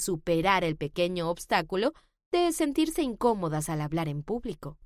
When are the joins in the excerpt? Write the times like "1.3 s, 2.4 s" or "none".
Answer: none